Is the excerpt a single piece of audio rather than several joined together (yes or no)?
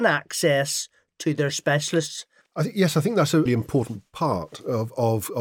no